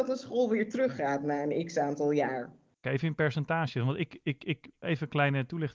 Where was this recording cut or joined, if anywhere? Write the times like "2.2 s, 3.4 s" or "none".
2.8 s, 4.8 s